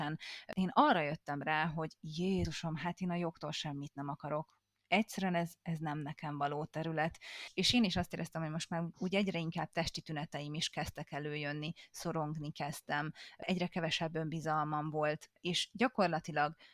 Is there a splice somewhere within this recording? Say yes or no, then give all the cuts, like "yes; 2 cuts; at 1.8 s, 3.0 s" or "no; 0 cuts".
yes; 1 cut; at 8.9 s